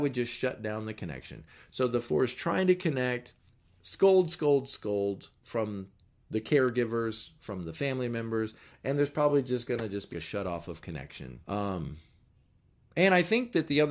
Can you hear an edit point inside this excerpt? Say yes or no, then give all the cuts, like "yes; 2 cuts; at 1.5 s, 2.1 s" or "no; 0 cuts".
yes; 2 cuts; at 10.1 s, 11.4 s